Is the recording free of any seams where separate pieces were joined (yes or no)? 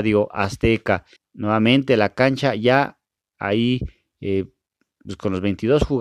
no